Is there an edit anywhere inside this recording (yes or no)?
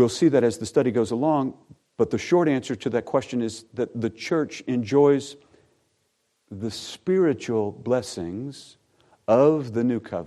no